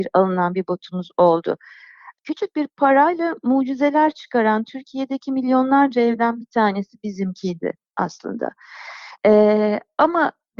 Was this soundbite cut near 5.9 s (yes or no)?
no